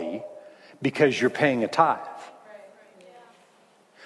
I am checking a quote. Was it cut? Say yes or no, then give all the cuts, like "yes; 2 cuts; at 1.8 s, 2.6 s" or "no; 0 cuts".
no; 0 cuts